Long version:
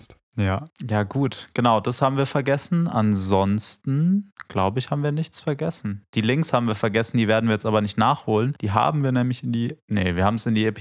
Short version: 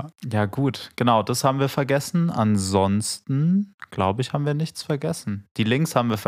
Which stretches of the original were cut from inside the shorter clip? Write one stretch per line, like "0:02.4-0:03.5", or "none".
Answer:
none

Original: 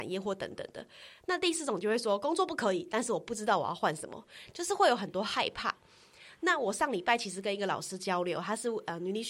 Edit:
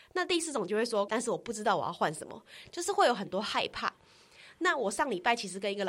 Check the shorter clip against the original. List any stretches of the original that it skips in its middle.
0:02.2-0:02.9

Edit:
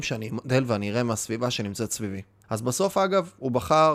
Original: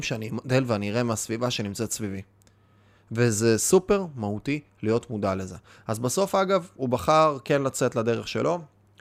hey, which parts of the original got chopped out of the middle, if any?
0:02.4-0:05.8

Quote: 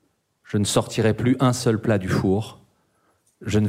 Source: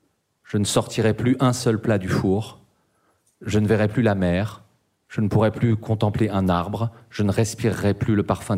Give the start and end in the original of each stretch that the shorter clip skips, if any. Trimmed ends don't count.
none

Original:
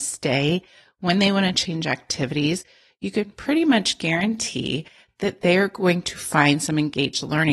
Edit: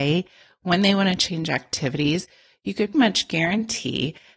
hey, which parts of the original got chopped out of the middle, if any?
0:03.3-0:03.6

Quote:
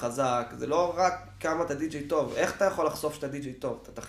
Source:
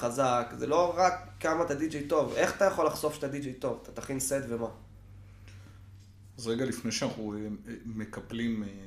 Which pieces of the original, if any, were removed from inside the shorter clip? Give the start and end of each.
none

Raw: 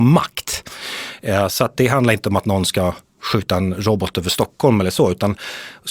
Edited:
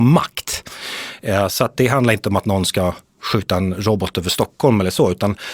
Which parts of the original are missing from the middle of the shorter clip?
none

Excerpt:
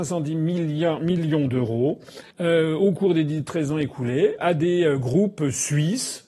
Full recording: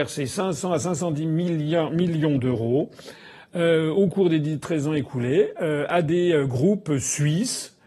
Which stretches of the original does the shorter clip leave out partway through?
0:03.2-0:03.5
0:05.5-0:05.9

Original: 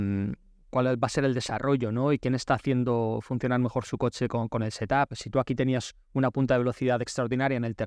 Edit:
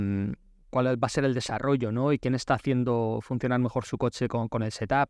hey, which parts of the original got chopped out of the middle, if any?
none

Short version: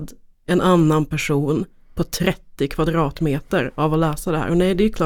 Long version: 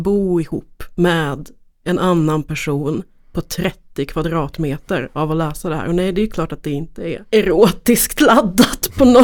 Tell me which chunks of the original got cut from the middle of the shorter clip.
none

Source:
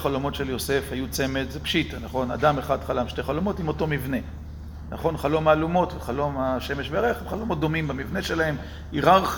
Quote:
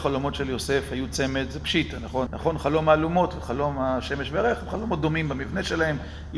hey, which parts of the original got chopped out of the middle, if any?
0:02.3-0:04.9

